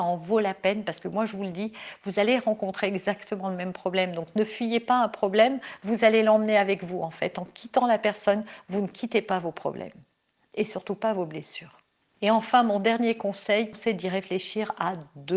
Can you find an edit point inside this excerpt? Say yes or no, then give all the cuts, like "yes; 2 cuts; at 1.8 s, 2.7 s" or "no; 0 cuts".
no; 0 cuts